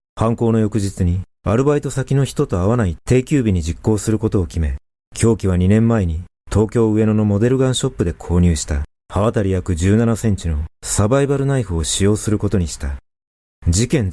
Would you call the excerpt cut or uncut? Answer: uncut